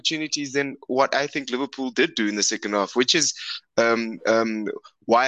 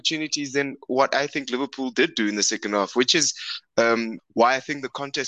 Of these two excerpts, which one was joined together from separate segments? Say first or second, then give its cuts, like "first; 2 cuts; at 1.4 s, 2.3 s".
second; 1 cut; at 4.2 s